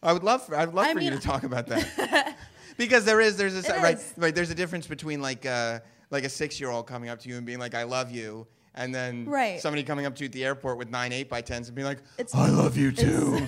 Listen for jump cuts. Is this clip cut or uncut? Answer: uncut